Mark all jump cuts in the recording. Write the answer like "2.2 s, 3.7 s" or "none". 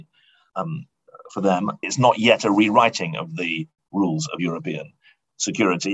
1.8 s